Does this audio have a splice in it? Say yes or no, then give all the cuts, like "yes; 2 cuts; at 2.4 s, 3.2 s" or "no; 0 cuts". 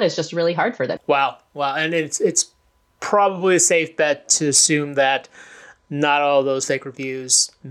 yes; 1 cut; at 1.0 s